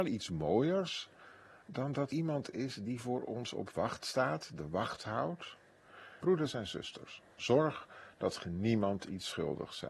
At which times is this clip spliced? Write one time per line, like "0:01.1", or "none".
0:02.1
0:06.2